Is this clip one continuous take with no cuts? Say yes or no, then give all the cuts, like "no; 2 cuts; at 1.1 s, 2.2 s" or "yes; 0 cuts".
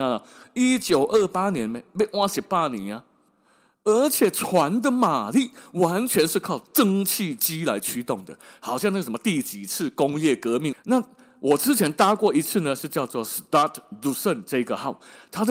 no; 1 cut; at 10.7 s